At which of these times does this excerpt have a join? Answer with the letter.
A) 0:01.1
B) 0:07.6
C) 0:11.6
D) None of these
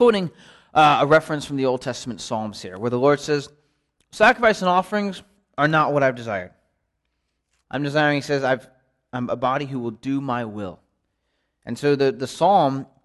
B